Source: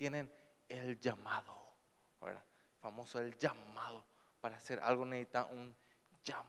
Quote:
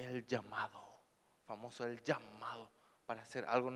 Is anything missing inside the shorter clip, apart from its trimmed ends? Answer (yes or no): yes